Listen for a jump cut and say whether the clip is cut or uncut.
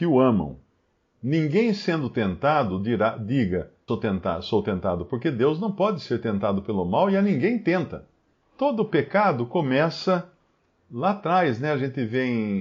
cut